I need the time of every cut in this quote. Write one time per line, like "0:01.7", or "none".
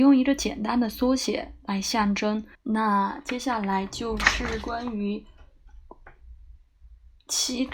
0:02.5